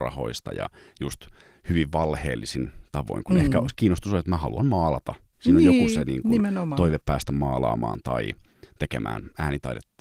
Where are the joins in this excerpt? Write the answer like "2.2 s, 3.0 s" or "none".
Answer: none